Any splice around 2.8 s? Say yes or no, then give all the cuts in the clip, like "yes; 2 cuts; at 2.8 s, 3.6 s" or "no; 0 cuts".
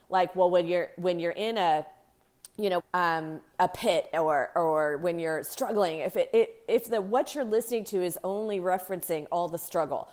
yes; 1 cut; at 2.8 s